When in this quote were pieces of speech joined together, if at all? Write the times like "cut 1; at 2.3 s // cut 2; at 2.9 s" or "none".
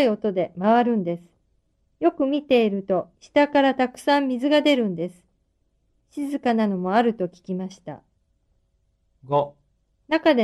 cut 1; at 3.1 s